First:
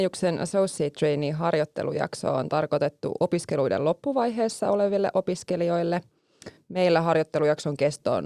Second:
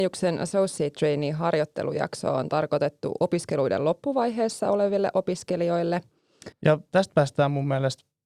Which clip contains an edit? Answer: second; 1 cut; at 6.5 s

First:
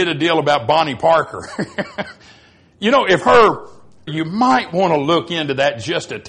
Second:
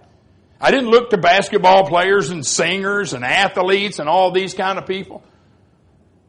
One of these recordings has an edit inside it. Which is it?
first; 1 cut; at 4.1 s

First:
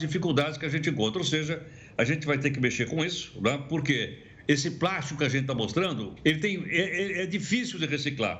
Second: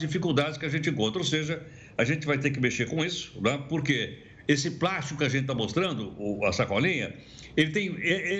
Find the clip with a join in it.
first; 1 cut; at 6.2 s

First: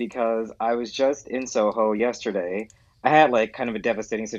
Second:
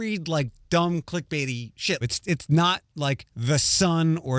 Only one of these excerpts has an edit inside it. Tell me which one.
second; 1 cut; at 2.0 s

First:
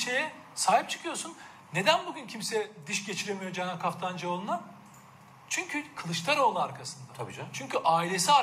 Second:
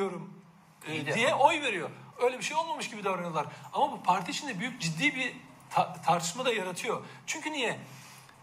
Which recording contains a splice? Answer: second; 1 cut; at 2.1 s

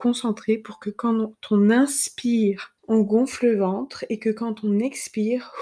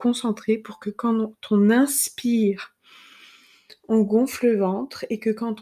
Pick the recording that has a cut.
first; 1 cut; at 2.8 s

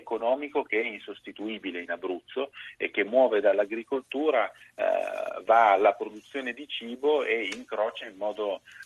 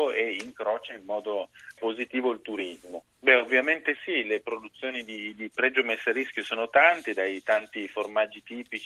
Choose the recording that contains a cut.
second; 2 cuts; at 1.8 s, 3.0 s

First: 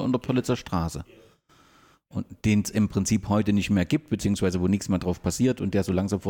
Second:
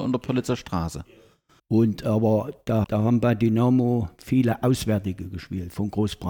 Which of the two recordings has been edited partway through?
second; 2 cuts; at 1.6 s, 2.8 s

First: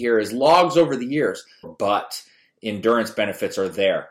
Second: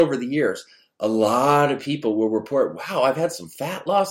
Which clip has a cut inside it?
first; 1 cut; at 1.6 s

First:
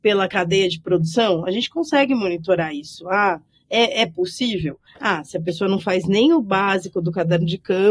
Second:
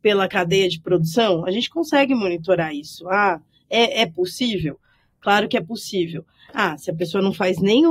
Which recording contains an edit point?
first; 1 cut; at 4.9 s

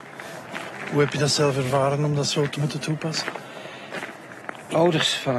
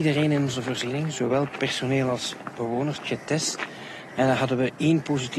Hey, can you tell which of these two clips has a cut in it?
second; 2 cuts; at 3.0 s, 4.1 s

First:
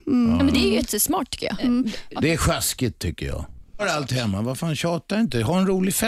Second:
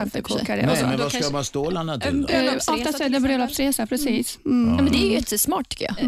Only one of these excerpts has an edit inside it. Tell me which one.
first; 2 cuts; at 2.2 s, 3.8 s

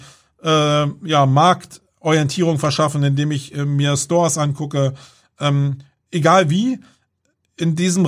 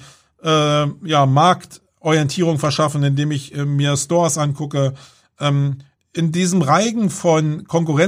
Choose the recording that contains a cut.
second; 1 cut; at 6.0 s

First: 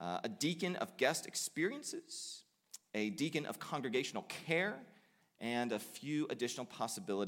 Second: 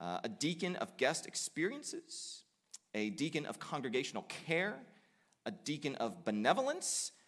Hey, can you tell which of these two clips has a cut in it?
first; 1 cut; at 5.2 s

